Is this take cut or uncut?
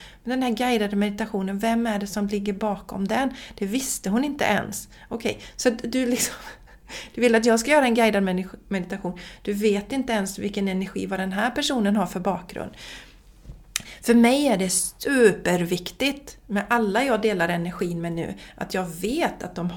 uncut